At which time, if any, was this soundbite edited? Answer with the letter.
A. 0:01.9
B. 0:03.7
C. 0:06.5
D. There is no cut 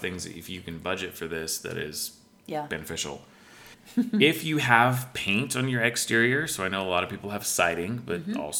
B